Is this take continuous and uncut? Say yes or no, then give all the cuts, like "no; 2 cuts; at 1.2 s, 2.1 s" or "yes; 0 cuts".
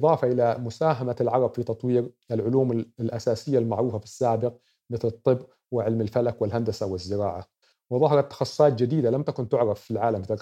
no; 1 cut; at 7.7 s